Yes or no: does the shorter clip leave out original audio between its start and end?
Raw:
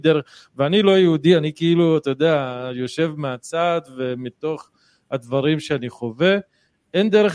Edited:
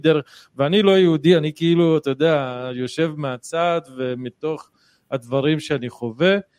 no